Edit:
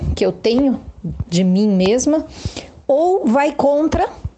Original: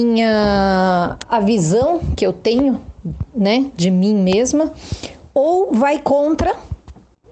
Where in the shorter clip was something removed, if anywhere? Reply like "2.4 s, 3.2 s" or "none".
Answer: 1.2 s